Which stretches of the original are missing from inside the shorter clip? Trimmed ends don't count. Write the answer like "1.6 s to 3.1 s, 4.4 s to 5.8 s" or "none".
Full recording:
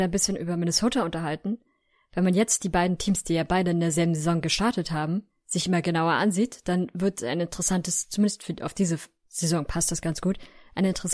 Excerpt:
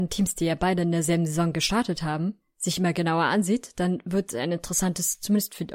none